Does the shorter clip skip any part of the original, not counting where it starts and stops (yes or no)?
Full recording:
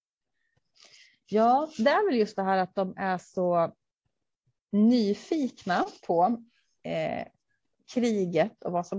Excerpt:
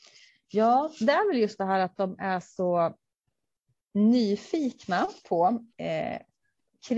yes